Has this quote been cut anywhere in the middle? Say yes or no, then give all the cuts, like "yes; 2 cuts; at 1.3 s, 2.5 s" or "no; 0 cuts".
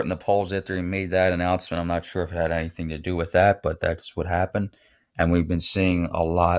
no; 0 cuts